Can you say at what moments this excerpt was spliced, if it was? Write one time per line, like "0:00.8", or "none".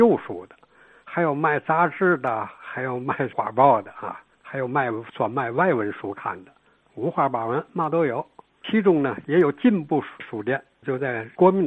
0:06.8